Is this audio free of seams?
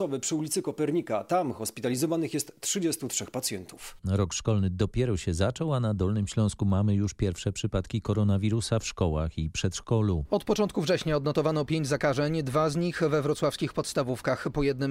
no; 1 cut; at 4.0 s

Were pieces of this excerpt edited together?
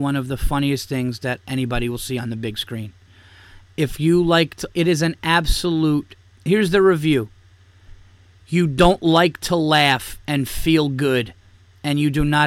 no; 0 cuts

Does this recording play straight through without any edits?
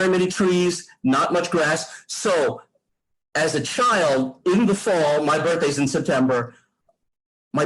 yes; 0 cuts

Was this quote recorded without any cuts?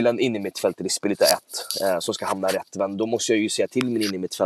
yes; 0 cuts

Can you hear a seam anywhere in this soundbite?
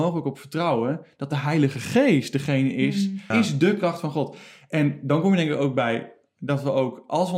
yes; 1 cut; at 3.3 s

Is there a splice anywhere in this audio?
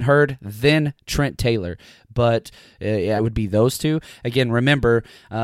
yes; 1 cut; at 3.2 s

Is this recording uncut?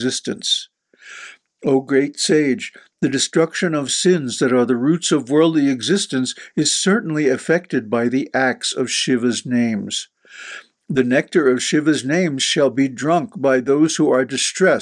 yes; 0 cuts

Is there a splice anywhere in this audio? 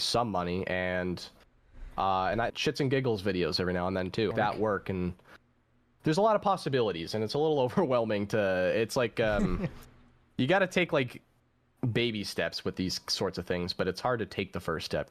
yes; 2 cuts; at 2.5 s, 4.3 s

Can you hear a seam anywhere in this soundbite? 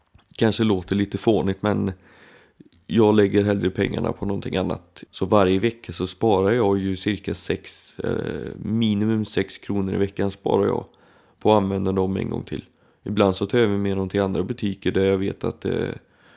yes; 1 cut; at 5.1 s

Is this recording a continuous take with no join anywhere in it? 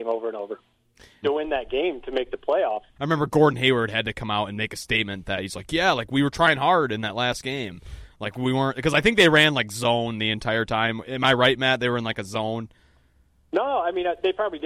no; 2 cuts; at 1.2 s, 3.0 s

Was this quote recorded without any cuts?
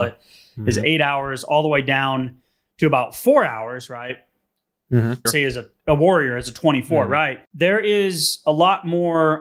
no; 2 cuts; at 5.3 s, 7.5 s

